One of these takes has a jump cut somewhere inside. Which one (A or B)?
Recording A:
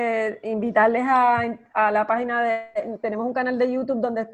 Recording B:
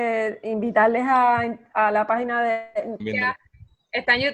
B